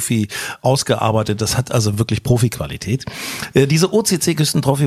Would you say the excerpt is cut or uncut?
uncut